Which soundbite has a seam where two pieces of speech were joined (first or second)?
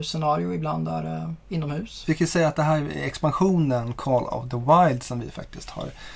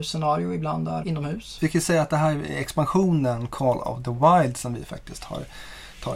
second